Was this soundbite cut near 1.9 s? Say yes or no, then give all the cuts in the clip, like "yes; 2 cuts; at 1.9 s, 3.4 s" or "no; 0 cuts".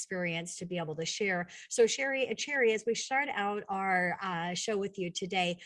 no; 0 cuts